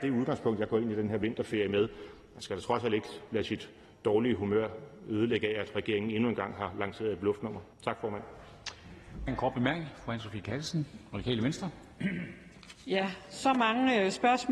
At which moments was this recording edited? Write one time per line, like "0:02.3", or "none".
0:07.7
0:09.3